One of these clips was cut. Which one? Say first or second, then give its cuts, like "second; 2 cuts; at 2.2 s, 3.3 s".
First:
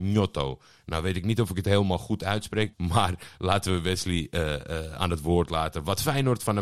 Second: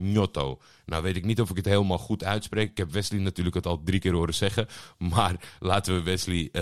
first; 1 cut; at 2.7 s